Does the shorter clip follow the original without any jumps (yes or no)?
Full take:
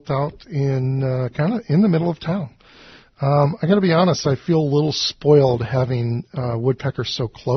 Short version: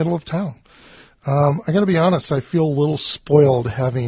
yes